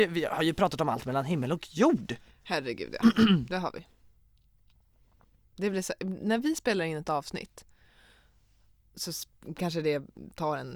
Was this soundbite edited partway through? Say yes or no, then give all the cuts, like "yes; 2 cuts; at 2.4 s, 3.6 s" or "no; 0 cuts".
no; 0 cuts